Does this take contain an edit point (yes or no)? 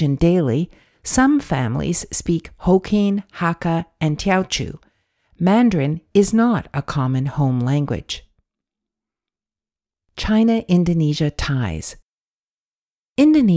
no